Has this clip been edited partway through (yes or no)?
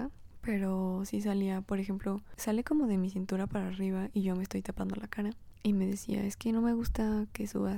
yes